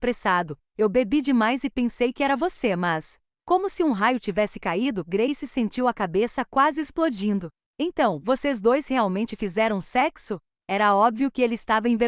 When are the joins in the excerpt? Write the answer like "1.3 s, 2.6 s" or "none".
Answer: none